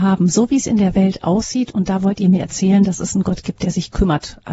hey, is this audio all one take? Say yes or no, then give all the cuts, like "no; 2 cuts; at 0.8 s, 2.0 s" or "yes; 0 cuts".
yes; 0 cuts